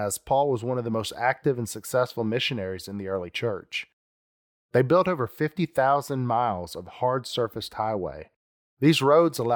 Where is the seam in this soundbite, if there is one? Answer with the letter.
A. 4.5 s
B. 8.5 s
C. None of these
A